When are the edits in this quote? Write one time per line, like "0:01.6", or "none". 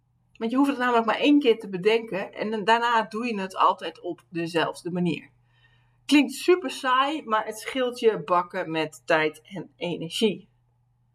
none